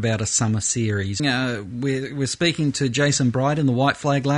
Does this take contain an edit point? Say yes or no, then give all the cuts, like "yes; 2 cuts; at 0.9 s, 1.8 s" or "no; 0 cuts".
yes; 1 cut; at 1.2 s